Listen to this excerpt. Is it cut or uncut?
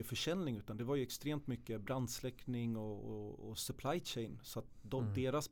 uncut